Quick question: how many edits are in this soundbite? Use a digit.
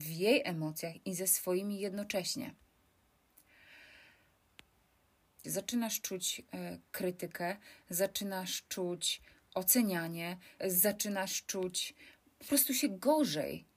2